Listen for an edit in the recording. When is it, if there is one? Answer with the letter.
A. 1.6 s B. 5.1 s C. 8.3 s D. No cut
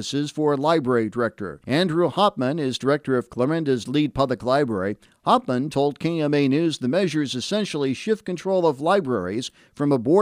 A